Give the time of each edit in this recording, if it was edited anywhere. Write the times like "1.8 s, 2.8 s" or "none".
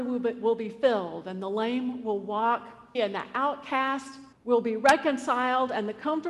2.9 s, 4.3 s